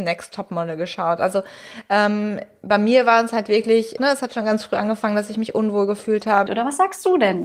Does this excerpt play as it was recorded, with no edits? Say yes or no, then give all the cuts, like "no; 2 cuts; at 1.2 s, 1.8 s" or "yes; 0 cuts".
no; 2 cuts; at 4.0 s, 6.5 s